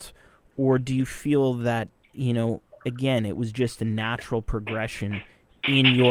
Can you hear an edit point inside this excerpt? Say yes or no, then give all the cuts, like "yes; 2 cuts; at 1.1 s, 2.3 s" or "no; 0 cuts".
no; 0 cuts